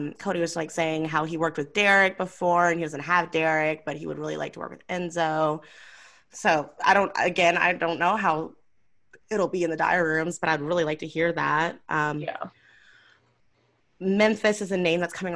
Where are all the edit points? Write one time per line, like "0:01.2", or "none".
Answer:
none